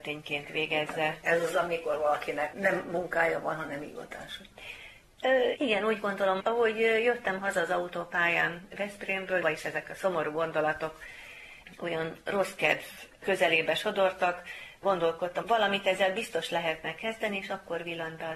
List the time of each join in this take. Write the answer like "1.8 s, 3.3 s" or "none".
5.5 s, 9.4 s, 15.4 s